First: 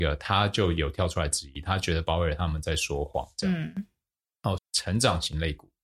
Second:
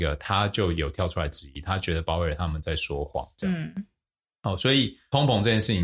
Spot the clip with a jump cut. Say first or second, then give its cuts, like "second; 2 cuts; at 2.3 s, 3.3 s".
first; 1 cut; at 4.6 s